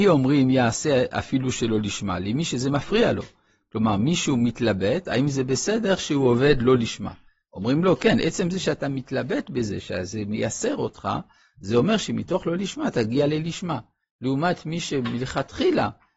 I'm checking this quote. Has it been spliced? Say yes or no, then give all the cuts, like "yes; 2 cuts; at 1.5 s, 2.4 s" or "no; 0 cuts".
no; 0 cuts